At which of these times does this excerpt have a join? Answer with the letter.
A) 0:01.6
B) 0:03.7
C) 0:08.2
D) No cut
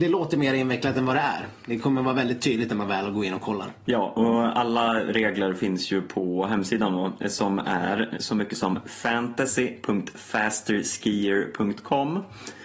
C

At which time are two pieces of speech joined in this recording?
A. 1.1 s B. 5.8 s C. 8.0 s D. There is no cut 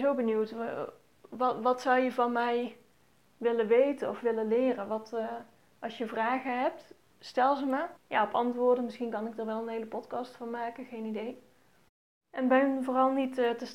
C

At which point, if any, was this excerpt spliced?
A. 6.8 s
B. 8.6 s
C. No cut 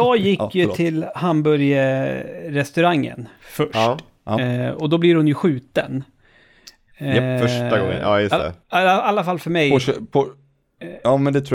B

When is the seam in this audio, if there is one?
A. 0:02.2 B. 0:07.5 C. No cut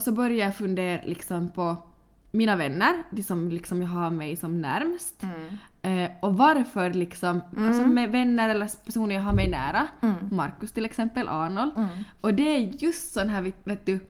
B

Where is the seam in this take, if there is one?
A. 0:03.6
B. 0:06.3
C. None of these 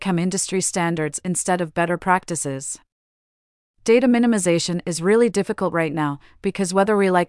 A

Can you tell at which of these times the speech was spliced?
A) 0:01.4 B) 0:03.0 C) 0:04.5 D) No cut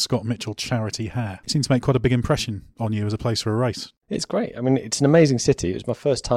A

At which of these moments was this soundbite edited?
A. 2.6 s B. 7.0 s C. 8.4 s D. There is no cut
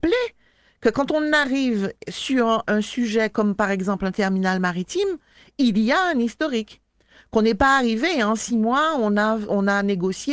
A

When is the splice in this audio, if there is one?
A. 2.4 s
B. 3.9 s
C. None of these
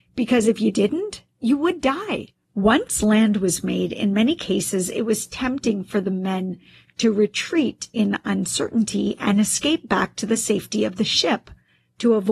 A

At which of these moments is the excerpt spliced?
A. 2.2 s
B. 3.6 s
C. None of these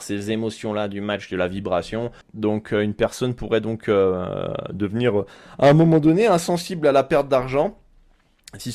A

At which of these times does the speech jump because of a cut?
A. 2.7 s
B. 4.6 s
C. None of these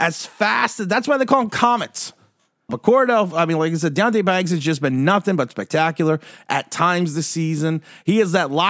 A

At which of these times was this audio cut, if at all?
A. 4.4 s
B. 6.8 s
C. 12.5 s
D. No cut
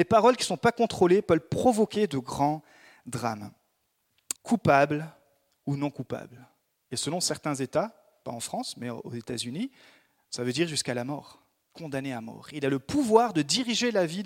A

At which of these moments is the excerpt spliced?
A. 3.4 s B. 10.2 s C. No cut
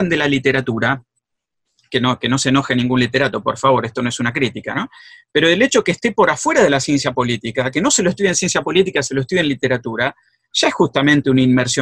C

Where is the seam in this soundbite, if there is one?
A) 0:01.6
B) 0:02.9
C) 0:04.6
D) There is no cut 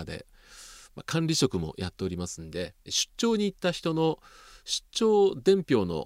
B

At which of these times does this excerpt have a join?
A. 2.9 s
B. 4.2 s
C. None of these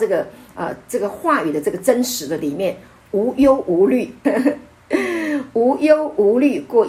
B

